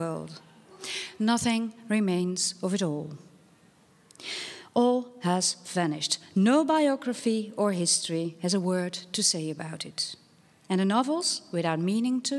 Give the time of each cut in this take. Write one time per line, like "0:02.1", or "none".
none